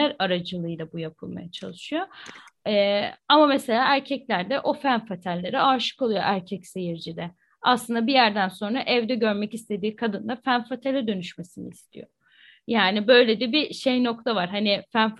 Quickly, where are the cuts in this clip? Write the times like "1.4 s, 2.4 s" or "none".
none

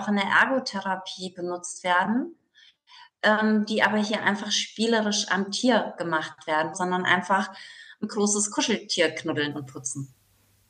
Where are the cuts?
6.7 s

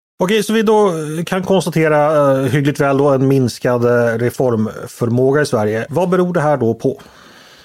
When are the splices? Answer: 5.9 s

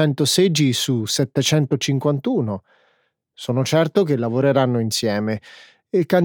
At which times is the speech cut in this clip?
none

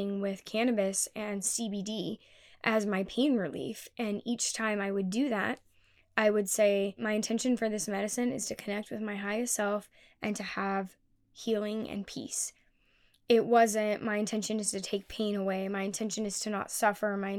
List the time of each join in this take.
none

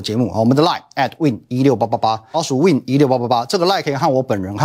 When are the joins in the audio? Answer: 2.3 s

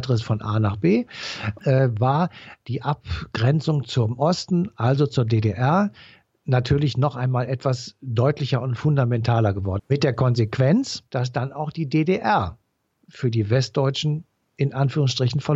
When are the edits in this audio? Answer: 1.6 s, 9.8 s, 11.1 s

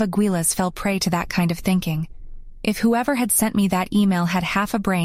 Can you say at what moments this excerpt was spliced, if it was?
2.6 s

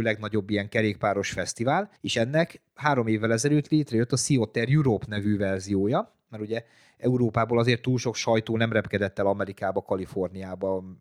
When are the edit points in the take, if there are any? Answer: 2.0 s

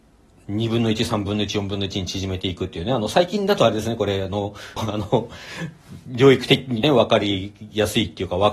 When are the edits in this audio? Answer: 4.8 s, 6.8 s

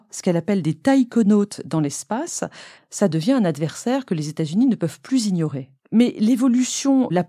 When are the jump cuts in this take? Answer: 2.7 s, 5.8 s

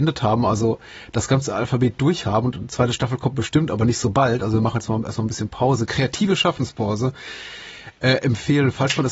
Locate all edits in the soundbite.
none

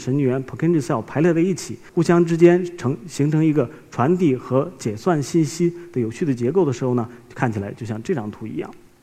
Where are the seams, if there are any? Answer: 1.9 s

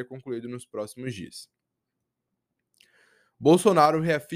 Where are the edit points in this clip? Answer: none

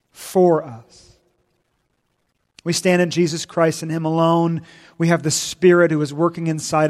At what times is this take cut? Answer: none

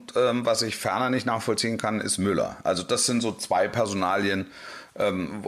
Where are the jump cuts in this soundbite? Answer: none

